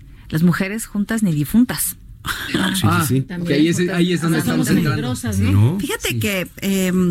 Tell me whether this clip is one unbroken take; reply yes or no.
no